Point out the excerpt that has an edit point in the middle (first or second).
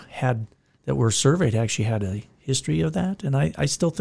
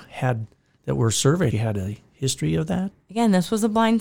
second